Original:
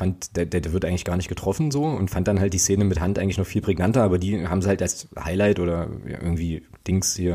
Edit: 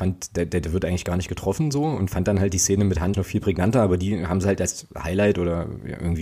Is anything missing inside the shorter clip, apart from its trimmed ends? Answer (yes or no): yes